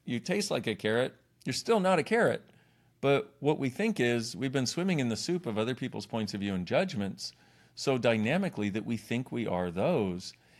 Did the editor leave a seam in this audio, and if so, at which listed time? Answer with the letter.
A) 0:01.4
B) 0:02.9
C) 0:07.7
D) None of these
D